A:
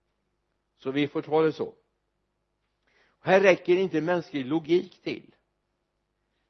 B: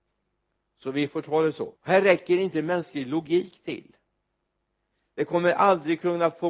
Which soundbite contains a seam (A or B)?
B